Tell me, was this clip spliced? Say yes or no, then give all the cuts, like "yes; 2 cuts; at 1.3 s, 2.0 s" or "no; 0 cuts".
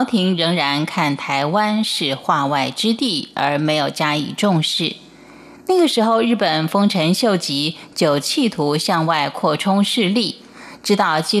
no; 0 cuts